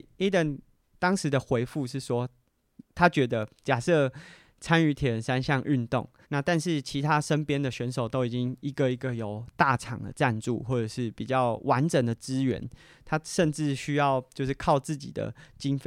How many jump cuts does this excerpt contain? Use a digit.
1